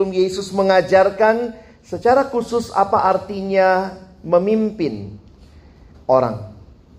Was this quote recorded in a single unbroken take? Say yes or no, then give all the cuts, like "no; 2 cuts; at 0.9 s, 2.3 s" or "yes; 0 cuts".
no; 1 cut; at 5.9 s